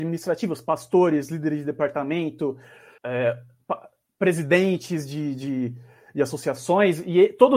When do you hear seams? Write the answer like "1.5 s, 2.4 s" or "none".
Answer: 3.0 s